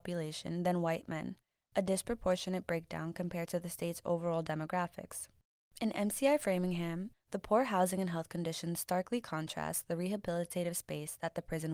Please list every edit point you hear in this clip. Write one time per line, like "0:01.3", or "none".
0:07.1

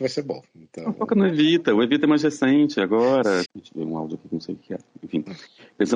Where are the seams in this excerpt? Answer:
0:03.4

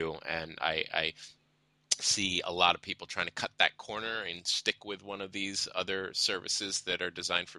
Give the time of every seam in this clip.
none

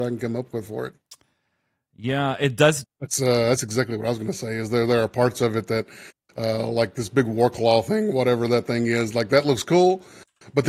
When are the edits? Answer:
0:02.8

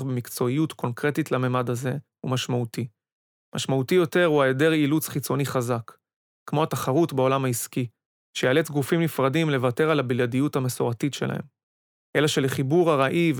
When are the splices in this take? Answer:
0:12.1

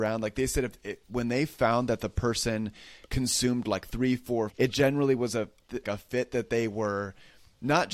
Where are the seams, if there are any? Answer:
0:04.5
0:05.8

